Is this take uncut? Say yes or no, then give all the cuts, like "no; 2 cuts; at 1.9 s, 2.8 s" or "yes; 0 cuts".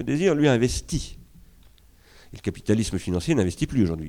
yes; 0 cuts